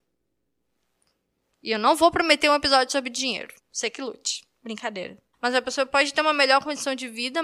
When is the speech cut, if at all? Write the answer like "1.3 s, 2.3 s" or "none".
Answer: 3.6 s, 5.3 s